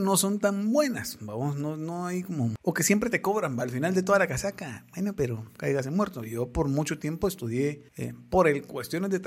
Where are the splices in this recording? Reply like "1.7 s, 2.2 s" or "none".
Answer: 7.9 s